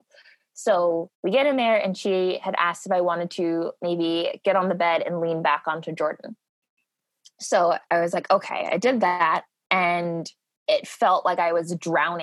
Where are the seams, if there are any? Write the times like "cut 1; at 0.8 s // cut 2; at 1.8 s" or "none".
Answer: cut 1; at 1.1 s